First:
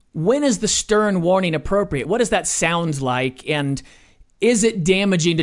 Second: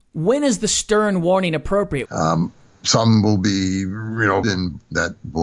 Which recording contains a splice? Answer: second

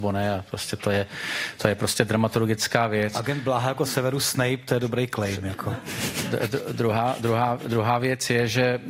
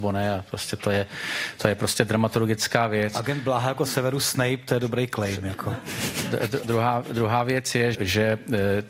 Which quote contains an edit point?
second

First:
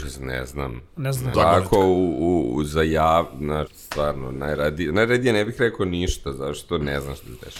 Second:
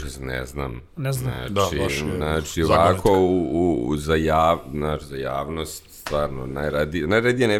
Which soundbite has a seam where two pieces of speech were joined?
first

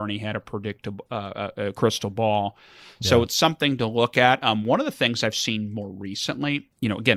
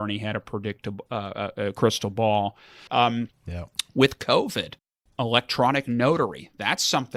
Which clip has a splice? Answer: second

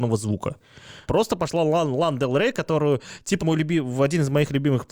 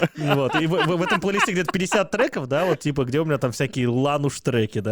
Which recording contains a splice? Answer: first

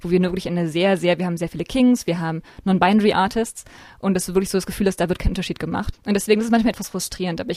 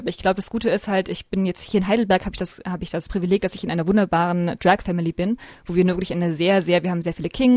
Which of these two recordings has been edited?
first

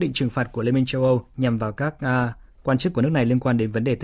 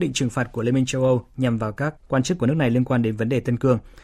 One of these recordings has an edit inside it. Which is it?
second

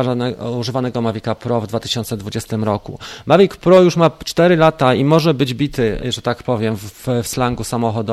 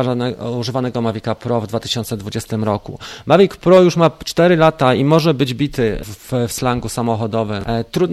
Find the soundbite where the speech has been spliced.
second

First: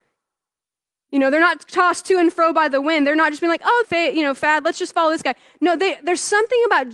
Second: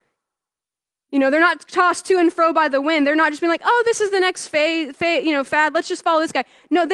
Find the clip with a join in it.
first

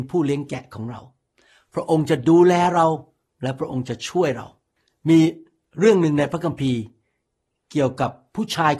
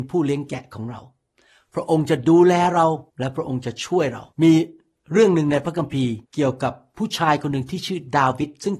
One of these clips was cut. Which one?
second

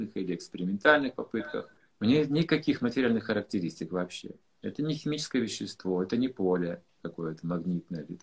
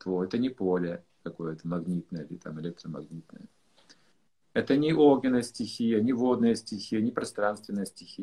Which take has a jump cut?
first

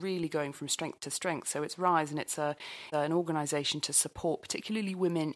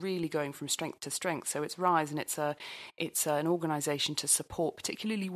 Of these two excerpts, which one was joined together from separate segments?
first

